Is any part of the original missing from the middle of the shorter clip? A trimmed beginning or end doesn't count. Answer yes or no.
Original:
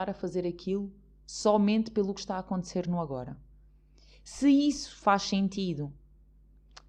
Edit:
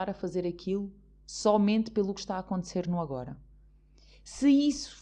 no